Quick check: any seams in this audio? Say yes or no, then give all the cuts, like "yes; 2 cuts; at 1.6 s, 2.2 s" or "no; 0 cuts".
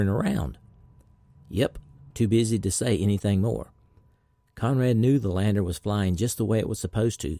yes; 1 cut; at 2.1 s